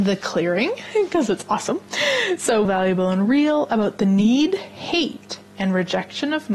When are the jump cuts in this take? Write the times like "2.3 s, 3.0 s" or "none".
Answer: 2.6 s